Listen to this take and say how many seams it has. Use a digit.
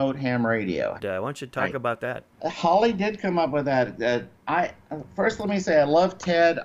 2